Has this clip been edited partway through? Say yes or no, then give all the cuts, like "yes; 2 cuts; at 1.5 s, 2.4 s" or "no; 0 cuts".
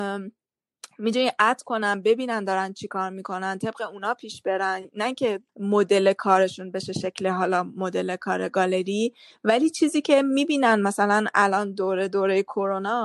yes; 1 cut; at 5.5 s